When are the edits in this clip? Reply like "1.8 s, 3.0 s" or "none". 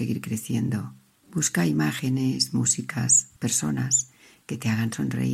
1.2 s, 3.4 s